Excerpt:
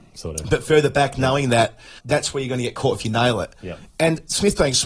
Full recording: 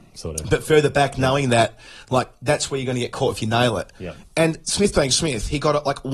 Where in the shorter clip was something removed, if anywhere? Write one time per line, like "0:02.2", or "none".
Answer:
0:02.0

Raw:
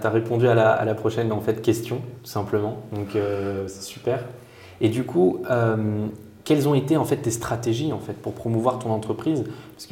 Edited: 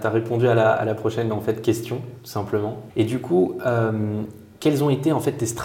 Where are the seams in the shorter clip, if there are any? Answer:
0:02.9

